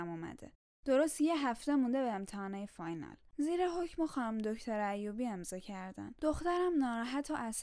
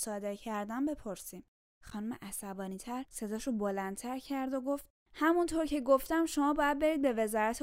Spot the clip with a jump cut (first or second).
first